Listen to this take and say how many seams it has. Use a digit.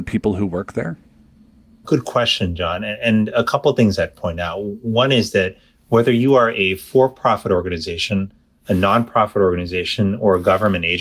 0